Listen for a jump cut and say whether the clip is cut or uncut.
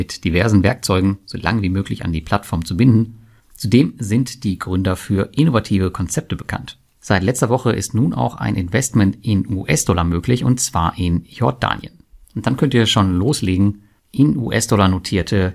cut